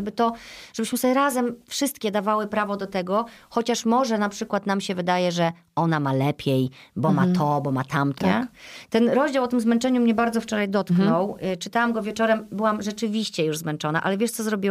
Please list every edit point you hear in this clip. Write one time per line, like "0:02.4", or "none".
0:08.2